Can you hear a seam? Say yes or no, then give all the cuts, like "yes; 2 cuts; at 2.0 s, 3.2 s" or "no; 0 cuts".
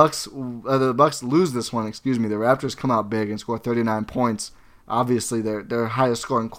no; 0 cuts